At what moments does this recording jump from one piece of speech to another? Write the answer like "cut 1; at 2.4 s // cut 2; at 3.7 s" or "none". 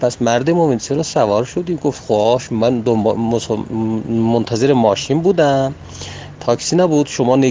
none